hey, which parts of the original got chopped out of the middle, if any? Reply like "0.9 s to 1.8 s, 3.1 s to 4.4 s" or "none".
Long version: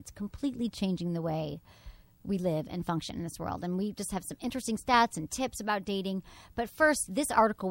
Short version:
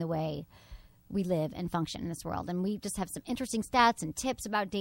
none